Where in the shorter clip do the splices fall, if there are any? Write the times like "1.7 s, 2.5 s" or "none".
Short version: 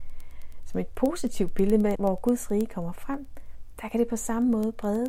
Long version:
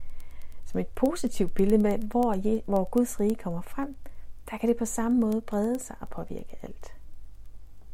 2.0 s